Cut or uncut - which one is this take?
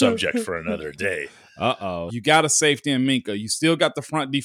cut